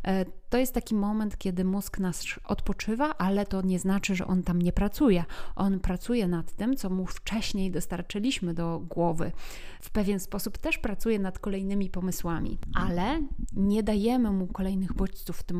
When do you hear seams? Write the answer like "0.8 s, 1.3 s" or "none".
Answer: none